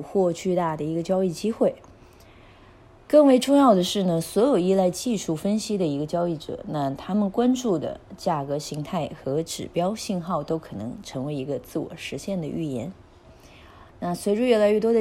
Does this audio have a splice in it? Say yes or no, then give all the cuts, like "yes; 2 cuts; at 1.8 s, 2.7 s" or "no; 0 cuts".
no; 0 cuts